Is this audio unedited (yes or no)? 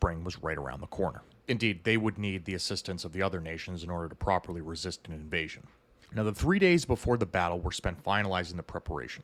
no